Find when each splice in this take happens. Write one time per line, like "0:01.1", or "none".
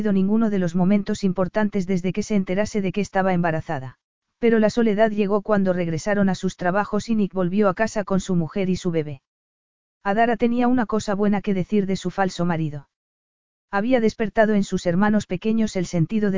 0:04.2